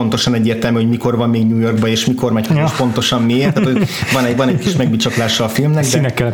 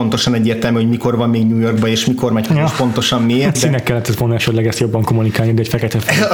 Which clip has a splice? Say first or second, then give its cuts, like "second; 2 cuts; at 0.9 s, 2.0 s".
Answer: second; 1 cut; at 3.5 s